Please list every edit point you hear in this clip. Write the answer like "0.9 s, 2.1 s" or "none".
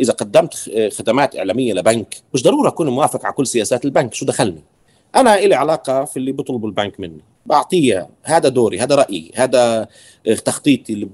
2.2 s